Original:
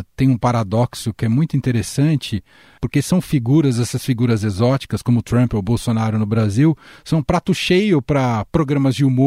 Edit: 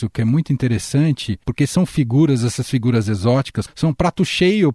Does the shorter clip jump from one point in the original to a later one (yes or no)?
yes